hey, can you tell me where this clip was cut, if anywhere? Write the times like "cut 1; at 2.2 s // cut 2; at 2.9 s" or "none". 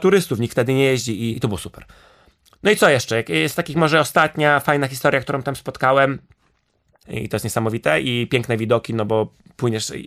cut 1; at 1.3 s // cut 2; at 7.0 s